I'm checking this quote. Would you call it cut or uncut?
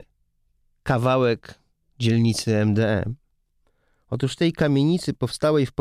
uncut